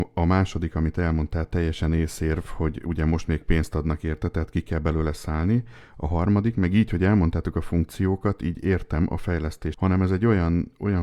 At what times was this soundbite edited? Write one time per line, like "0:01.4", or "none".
0:09.7